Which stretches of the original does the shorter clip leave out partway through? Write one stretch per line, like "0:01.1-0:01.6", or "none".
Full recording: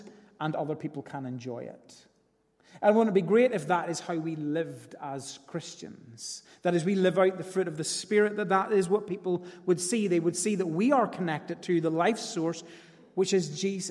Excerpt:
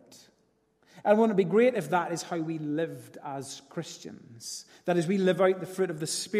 none